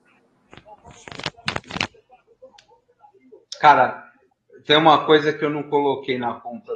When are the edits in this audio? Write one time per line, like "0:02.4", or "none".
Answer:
none